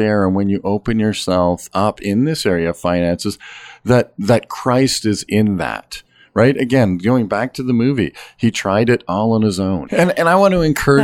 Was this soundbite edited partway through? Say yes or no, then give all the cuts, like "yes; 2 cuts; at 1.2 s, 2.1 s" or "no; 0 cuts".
yes; 1 cut; at 9.9 s